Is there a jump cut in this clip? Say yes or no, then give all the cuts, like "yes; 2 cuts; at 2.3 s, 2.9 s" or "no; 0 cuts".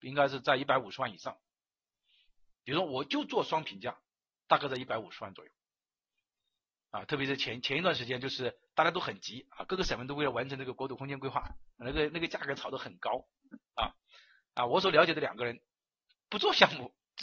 no; 0 cuts